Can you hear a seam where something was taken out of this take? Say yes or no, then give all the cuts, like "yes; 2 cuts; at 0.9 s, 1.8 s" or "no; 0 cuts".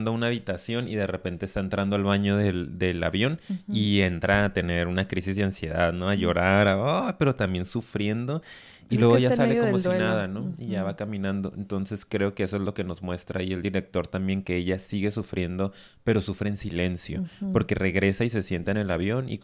no; 0 cuts